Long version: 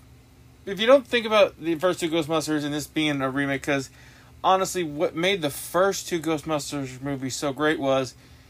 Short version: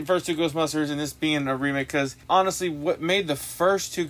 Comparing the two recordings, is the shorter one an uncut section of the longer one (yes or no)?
no